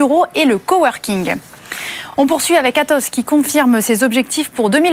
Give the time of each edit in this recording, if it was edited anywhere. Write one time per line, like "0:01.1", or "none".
none